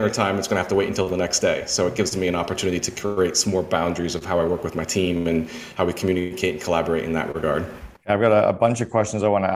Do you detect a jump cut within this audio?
yes; 1 cut; at 8.0 s

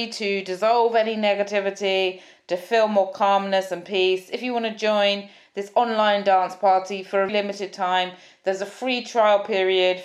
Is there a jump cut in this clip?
yes; 1 cut; at 7.3 s

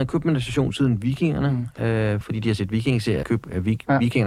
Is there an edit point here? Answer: yes; 2 cuts; at 2.2 s, 3.2 s

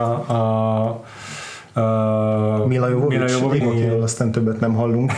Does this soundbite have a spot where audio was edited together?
yes; 1 cut; at 3.6 s

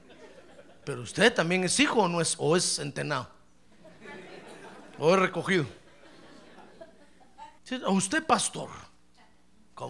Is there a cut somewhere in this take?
yes; 1 cut; at 7.6 s

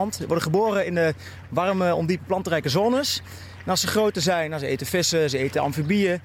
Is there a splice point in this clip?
no; 0 cuts

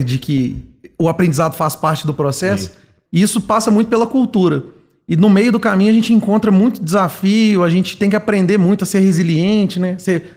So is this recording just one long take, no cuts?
no; 1 cut; at 3.1 s

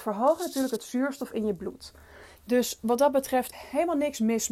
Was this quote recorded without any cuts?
no; 2 cuts; at 2.4 s, 3.5 s

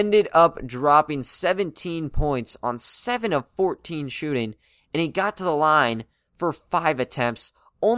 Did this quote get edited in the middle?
no; 0 cuts

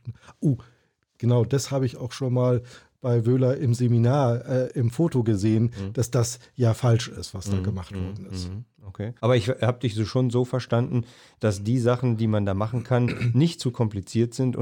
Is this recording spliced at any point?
yes; 1 cut; at 9.2 s

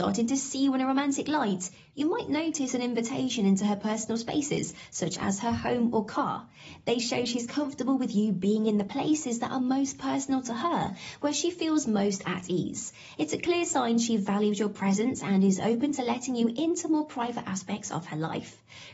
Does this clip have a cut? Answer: yes; 1 cut; at 6.8 s

